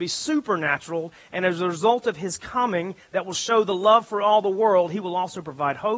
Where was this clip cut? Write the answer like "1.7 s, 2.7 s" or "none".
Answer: none

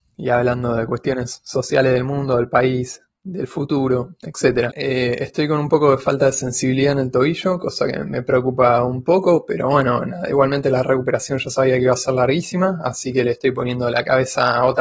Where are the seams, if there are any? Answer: 4.7 s

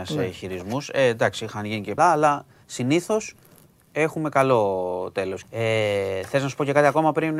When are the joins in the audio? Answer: 2.0 s, 5.4 s

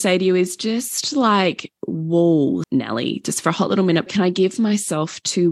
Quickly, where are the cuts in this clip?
2.6 s, 4.1 s

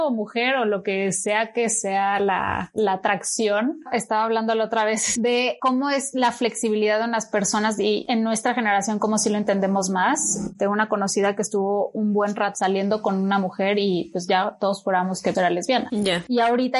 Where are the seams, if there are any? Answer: 15.3 s

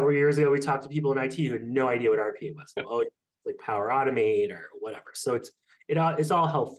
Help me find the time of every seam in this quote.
2.8 s

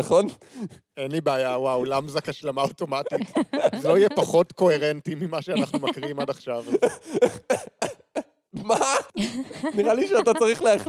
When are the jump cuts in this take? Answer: 8.5 s, 9.5 s

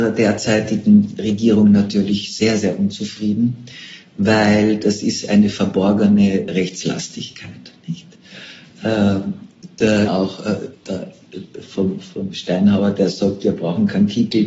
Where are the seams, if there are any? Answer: 10.1 s

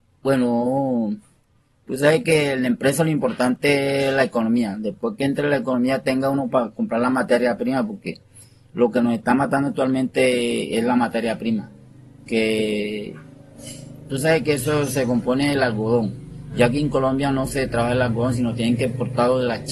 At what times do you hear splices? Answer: none

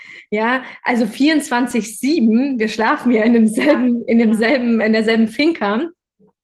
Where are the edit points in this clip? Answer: none

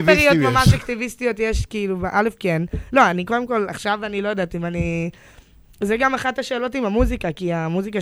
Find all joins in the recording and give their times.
none

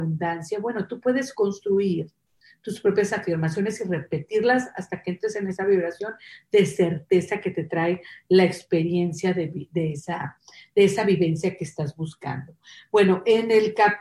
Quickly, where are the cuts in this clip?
none

